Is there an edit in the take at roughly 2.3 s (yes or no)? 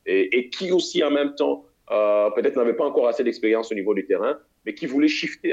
no